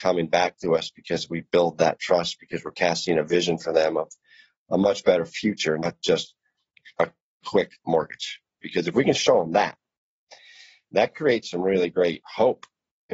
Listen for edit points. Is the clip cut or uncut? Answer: cut